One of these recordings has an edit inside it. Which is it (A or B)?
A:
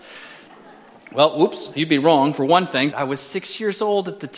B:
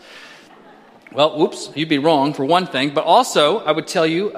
A